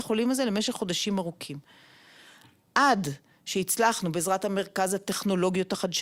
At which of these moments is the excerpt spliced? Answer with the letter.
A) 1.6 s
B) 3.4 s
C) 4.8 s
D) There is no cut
D